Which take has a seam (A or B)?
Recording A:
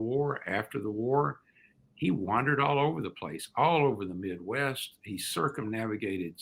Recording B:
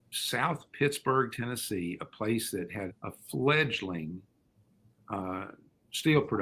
B